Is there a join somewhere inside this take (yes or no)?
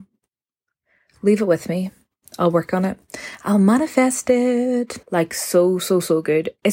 yes